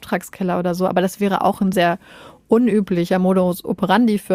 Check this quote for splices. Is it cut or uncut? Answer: cut